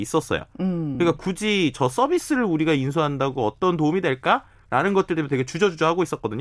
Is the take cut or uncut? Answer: uncut